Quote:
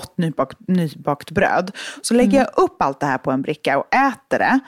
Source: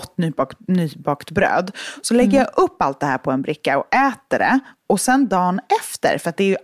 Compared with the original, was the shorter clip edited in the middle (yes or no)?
no